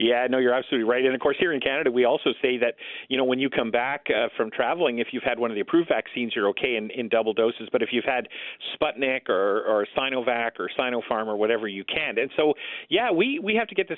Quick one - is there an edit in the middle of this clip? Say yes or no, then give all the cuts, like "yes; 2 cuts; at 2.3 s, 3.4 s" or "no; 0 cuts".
no; 0 cuts